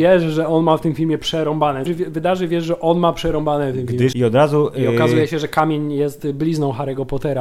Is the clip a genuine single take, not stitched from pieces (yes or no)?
no